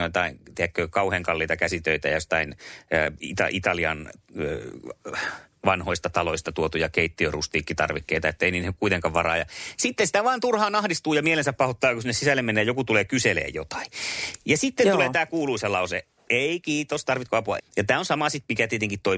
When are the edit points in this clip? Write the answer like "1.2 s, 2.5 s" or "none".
17.6 s